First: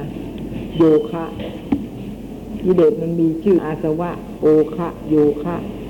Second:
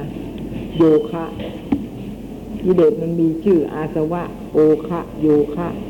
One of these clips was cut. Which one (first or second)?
first